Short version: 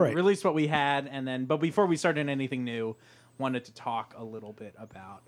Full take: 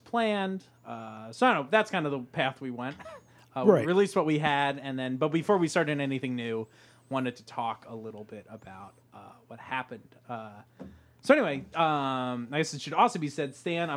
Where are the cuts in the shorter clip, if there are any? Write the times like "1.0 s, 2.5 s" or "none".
none